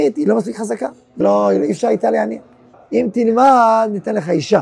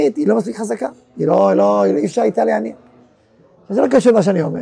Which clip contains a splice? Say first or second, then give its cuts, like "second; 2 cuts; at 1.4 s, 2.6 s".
first; 2 cuts; at 1.2 s, 2.7 s